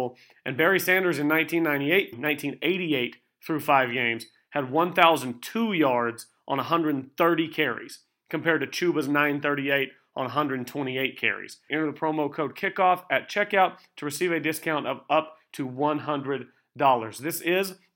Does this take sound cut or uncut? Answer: cut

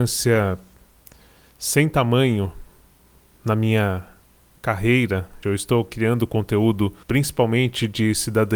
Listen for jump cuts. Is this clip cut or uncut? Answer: cut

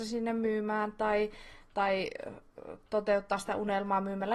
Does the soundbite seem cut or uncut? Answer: uncut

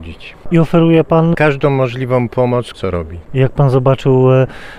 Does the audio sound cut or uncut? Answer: cut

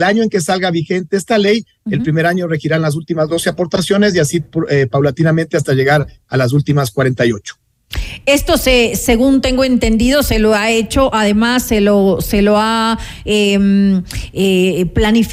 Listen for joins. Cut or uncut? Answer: uncut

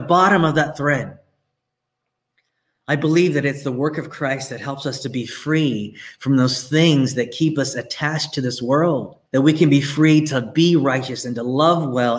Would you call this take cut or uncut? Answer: cut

